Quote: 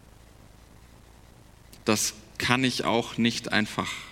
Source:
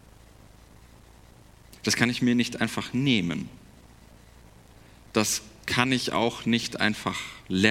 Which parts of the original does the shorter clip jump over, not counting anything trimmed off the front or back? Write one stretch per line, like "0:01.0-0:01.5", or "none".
0:01.8-0:05.0